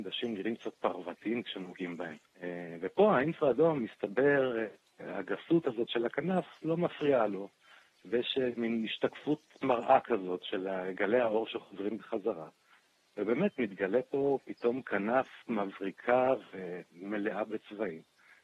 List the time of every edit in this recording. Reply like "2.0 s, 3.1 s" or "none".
2.3 s